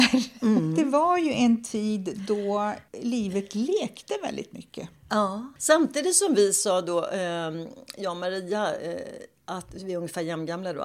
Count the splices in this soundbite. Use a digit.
0